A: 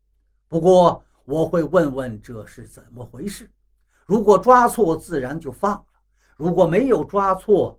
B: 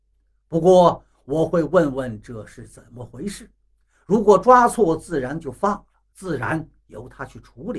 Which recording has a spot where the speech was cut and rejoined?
B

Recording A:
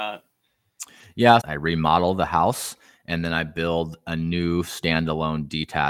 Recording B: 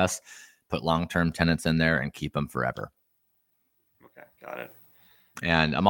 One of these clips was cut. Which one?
A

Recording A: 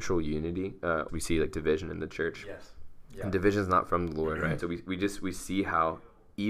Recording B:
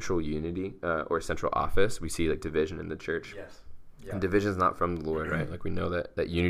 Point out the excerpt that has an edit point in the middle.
A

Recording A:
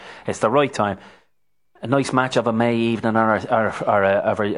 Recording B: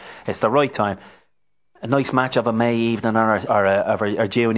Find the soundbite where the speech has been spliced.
B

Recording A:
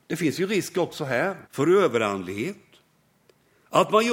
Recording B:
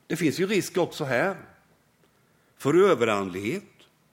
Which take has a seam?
A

